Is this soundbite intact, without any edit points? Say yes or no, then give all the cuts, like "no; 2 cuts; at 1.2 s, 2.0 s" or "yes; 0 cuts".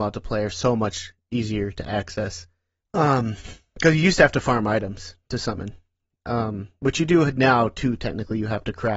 no; 1 cut; at 2.8 s